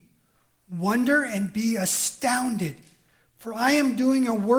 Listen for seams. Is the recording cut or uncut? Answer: uncut